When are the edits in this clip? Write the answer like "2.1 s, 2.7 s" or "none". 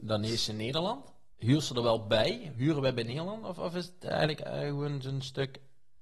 none